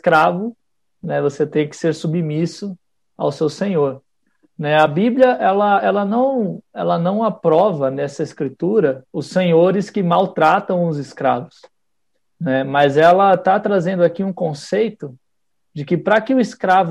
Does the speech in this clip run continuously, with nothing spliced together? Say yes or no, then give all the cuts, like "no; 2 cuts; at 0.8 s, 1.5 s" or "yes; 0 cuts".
no; 1 cut; at 9.1 s